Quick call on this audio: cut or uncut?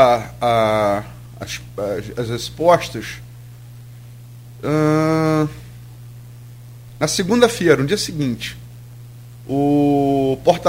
uncut